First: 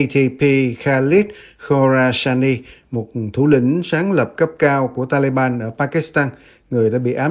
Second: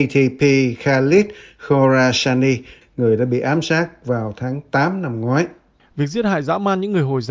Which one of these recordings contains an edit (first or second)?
second